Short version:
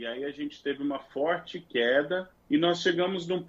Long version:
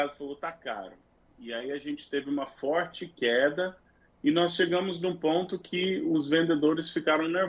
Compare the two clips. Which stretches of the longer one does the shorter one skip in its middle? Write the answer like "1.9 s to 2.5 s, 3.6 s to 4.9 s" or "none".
3.9 s to 4.1 s